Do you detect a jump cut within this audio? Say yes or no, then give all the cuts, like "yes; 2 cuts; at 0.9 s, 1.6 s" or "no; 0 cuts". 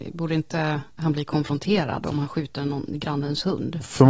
no; 0 cuts